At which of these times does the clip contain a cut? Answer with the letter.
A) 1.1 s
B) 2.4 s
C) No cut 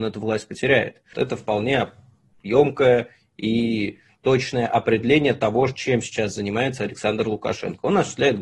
A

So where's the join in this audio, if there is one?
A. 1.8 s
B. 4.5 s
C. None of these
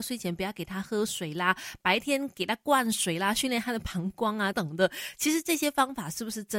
B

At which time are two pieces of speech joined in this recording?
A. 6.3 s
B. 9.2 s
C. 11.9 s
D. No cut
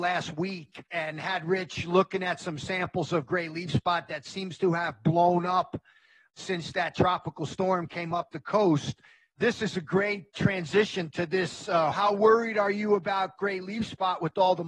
C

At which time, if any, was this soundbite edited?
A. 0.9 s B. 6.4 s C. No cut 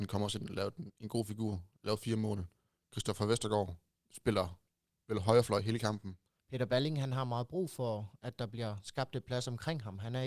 B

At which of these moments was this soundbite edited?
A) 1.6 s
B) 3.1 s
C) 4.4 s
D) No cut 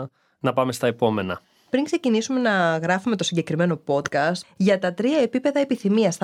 C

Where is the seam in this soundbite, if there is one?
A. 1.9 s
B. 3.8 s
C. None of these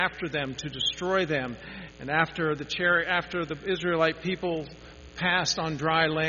A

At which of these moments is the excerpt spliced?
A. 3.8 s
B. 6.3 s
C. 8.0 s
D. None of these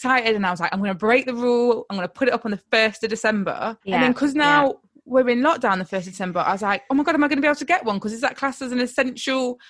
A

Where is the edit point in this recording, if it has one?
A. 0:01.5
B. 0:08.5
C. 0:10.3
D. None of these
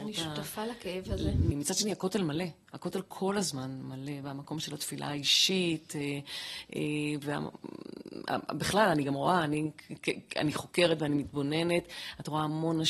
A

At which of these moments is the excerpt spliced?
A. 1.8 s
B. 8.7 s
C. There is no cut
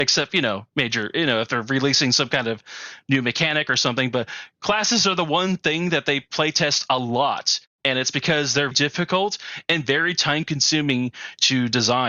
B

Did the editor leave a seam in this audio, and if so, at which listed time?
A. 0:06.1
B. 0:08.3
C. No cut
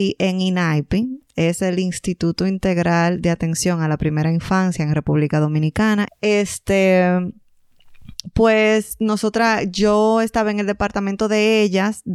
A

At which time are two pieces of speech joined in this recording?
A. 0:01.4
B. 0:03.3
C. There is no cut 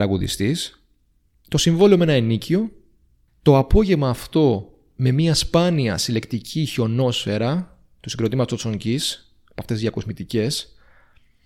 B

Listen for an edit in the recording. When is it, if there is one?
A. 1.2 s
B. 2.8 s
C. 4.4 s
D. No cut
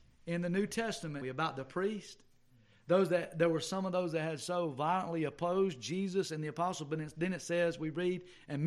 A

